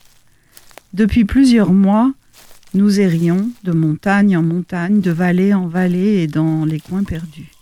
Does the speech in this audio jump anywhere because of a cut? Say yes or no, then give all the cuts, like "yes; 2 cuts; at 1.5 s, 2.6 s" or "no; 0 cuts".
no; 0 cuts